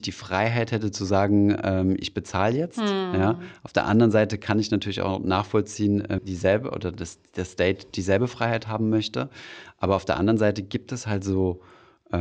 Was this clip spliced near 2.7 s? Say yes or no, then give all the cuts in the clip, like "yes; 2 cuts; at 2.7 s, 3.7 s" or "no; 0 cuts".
no; 1 cut; at 6.2 s